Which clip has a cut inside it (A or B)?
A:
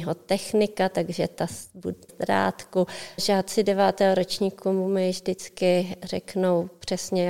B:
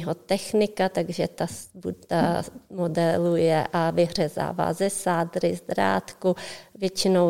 A